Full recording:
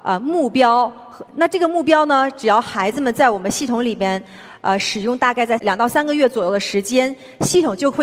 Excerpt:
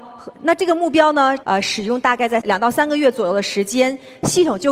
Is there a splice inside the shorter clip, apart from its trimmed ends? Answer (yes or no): yes